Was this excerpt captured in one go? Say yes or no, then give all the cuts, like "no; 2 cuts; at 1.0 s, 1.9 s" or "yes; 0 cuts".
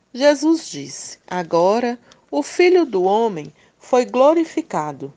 no; 1 cut; at 1.2 s